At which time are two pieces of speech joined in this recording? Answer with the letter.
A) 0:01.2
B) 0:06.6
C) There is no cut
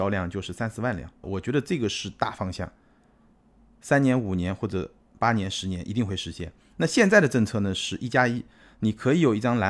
A